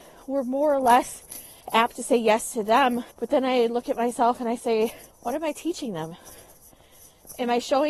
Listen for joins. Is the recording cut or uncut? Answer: cut